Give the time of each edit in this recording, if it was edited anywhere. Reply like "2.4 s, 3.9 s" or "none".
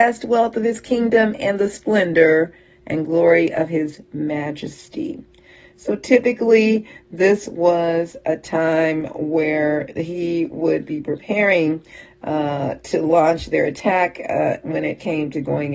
none